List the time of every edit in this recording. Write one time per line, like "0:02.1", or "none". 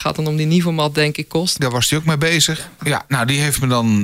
0:01.6
0:02.8